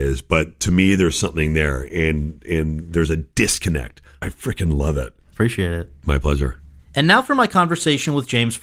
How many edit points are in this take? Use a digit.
1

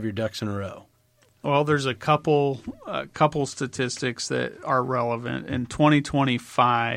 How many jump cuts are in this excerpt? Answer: 0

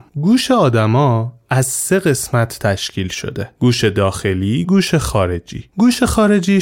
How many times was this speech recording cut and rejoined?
1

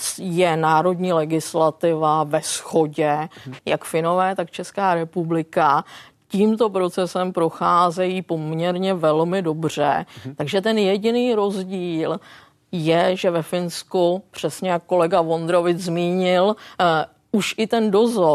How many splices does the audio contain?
1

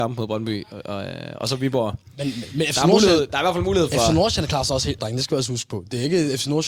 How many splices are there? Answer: 1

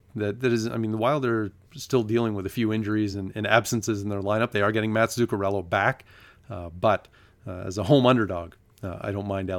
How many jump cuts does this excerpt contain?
0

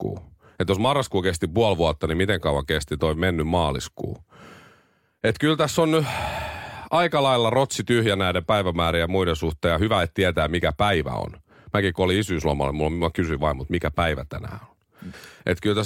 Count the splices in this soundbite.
0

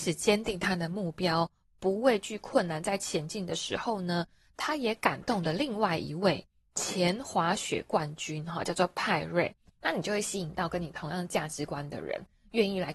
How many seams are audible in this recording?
1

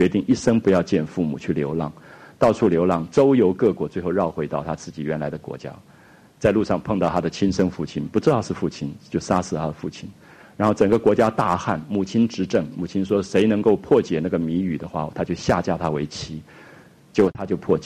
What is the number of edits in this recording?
0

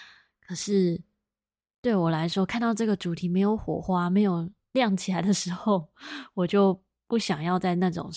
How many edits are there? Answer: 0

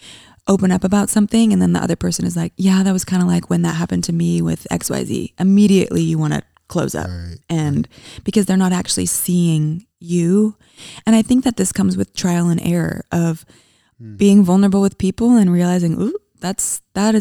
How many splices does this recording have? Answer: 0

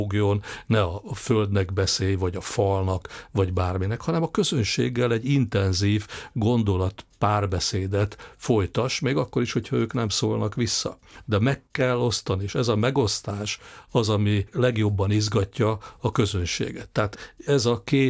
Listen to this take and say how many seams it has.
0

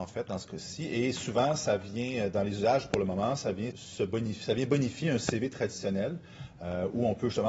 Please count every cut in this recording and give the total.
1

